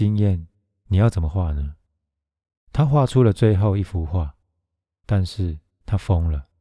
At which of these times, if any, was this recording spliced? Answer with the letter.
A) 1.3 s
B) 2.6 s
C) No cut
A